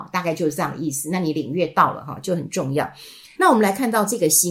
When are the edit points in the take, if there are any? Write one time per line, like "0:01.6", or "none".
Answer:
0:03.4